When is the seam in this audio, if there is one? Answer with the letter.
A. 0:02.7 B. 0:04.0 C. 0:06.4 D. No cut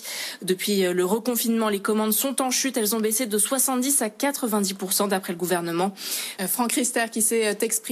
C